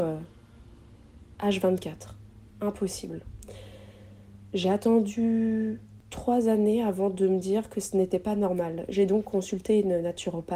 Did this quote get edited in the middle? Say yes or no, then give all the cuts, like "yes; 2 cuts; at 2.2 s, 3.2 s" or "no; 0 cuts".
no; 0 cuts